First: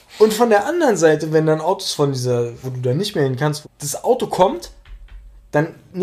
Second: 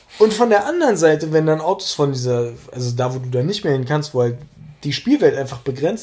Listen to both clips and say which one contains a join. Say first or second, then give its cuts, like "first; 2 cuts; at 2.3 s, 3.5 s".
first; 2 cuts; at 2.6 s, 3.6 s